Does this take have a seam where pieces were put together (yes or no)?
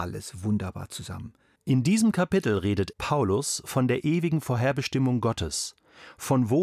yes